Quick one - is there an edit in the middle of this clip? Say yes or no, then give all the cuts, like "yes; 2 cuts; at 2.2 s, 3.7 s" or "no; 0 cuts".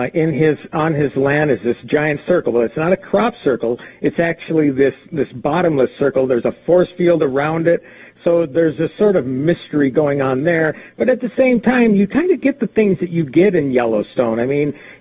no; 0 cuts